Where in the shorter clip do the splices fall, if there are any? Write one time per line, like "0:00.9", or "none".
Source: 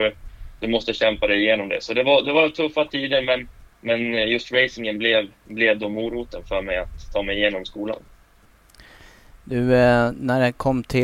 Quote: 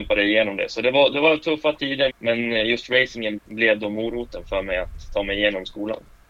0:02.1
0:03.4